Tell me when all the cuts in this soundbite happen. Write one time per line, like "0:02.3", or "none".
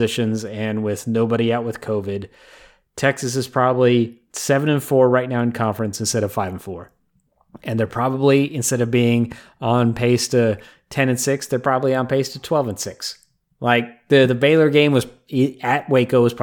none